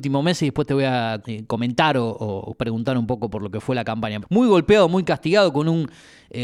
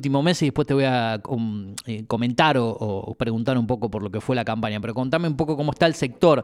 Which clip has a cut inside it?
first; 2 cuts; at 1.2 s, 4.2 s

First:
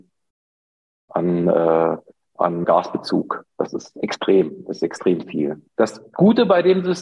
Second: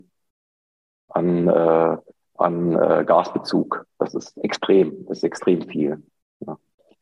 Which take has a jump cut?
first; 2 cuts; at 2.6 s, 5.8 s

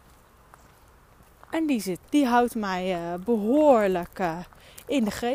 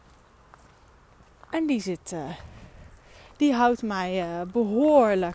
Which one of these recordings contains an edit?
first; 1 cut; at 2.0 s

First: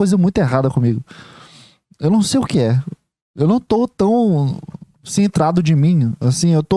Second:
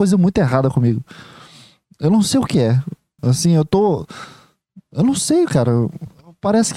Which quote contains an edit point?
second; 1 cut; at 3.2 s

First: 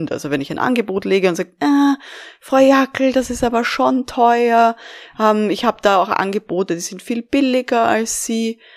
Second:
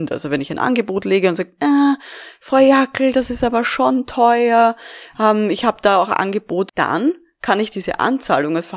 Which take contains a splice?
second; 1 cut; at 6.7 s

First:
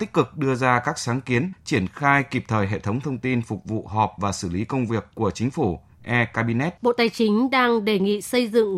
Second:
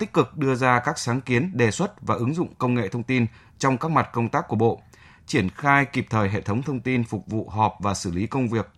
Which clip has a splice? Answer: first; 2 cuts; at 1.5 s, 6.8 s

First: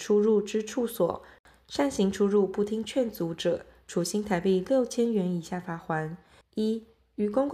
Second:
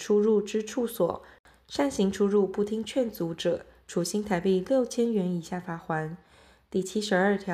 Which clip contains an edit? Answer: first; 1 cut; at 6.4 s

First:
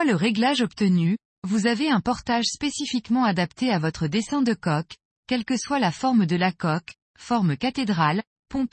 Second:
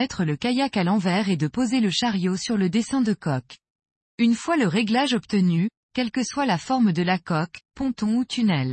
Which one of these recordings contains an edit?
second; 3 cuts; at 4.0 s, 5.8 s, 7.6 s

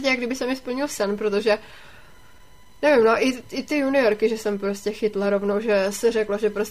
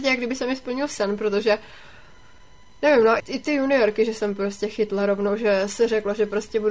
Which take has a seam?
second; 1 cut; at 3.2 s

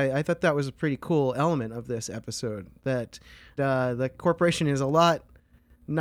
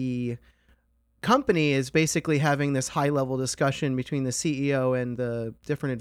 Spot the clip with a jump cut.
first; 1 cut; at 3.6 s

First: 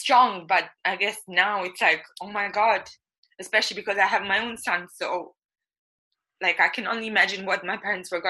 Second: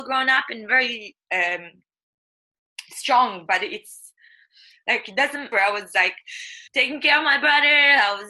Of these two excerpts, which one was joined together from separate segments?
second; 3 cuts; at 3.5 s, 5.5 s, 6.7 s

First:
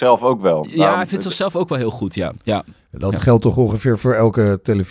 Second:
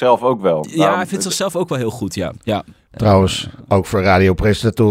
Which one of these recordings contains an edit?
second; 1 cut; at 2.9 s

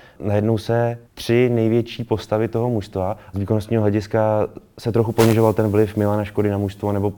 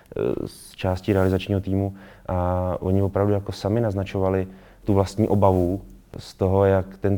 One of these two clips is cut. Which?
first; 2 cuts; at 1.0 s, 3.3 s

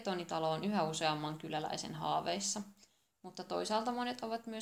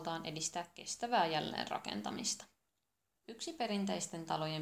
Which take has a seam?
second; 1 cut; at 3.1 s

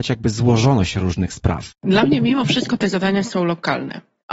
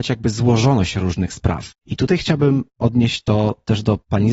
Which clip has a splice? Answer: first; 1 cut; at 1.8 s

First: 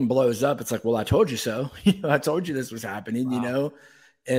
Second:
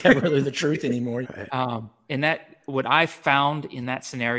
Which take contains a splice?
second; 1 cut; at 1.2 s

